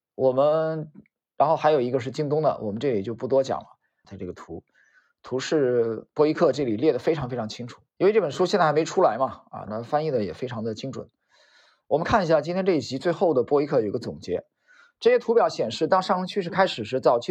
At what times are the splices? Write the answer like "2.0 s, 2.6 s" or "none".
4.0 s, 7.9 s, 9.7 s